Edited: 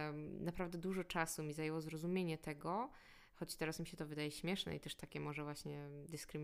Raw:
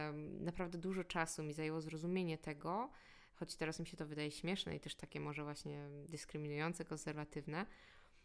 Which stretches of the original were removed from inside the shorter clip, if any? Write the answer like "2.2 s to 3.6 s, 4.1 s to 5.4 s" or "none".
none